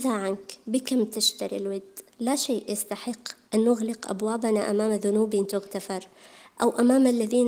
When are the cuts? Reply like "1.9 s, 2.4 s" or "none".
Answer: 2.1 s

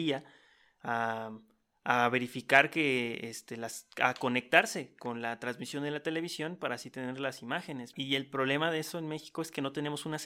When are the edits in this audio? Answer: 7.9 s

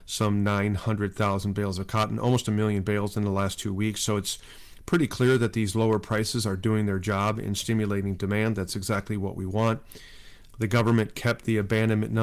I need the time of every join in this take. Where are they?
10.5 s

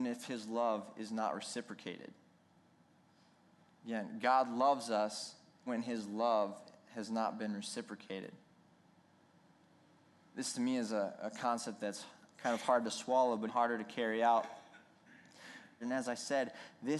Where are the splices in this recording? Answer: 5.7 s, 13.5 s, 15.8 s

